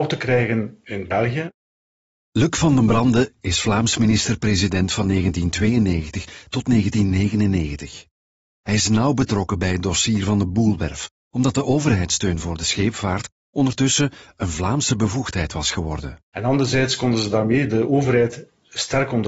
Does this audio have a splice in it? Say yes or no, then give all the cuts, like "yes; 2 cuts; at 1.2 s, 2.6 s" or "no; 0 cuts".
yes; 1 cut; at 16.3 s